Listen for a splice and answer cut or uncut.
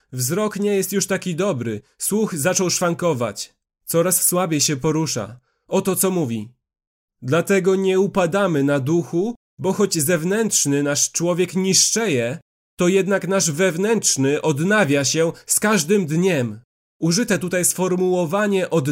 uncut